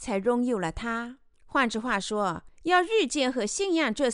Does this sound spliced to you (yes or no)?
yes